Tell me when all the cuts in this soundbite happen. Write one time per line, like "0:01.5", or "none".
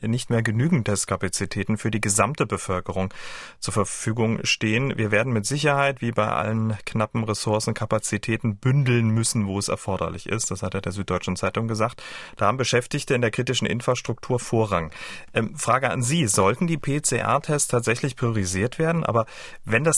0:12.3